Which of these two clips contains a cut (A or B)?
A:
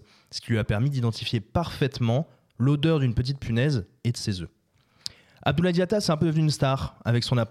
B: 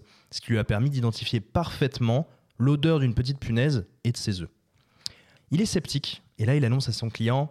B